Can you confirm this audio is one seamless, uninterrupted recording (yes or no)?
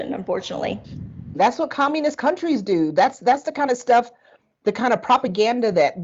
no